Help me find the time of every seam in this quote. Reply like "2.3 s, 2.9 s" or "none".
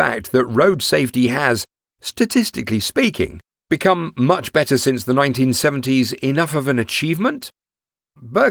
none